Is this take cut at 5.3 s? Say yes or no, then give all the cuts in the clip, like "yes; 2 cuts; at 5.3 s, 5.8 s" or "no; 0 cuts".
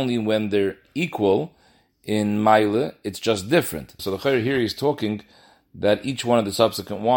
no; 1 cut; at 4.0 s